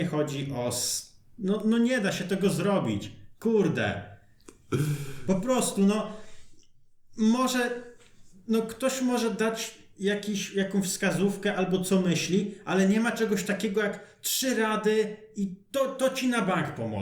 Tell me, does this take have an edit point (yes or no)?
no